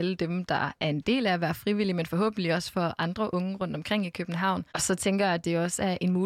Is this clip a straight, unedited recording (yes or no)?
no